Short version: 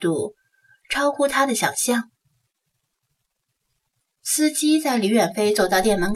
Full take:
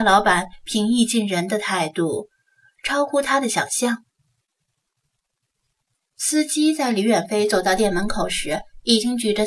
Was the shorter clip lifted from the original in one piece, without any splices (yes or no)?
yes